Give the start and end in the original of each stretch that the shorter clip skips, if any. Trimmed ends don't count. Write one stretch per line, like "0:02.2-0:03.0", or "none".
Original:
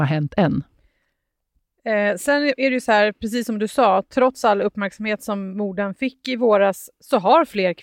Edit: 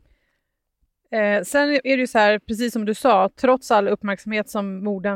none